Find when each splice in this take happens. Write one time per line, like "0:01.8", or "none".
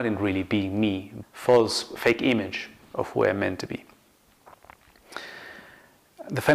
0:01.2